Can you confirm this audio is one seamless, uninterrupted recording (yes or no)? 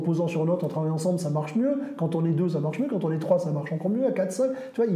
yes